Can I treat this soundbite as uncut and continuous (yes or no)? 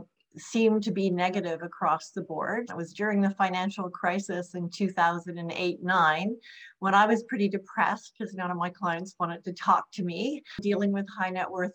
no